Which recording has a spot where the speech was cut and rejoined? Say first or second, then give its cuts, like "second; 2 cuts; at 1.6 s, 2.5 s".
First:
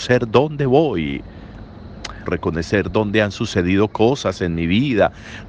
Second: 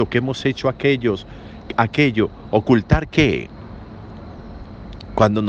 first; 1 cut; at 2.3 s